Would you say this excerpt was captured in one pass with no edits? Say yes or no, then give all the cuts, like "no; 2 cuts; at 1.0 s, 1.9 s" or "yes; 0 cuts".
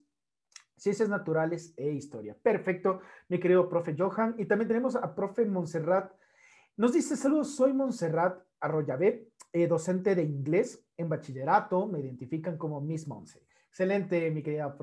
yes; 0 cuts